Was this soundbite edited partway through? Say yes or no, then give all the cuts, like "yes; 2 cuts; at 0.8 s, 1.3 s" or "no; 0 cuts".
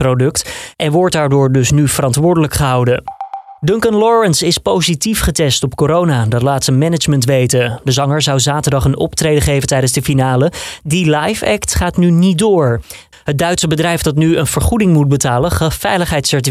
yes; 2 cuts; at 3.6 s, 13.1 s